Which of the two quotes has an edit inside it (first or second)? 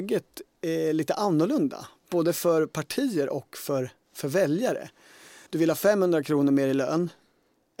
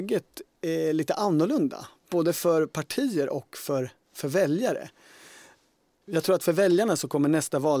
first